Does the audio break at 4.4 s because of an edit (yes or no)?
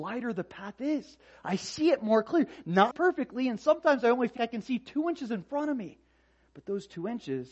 yes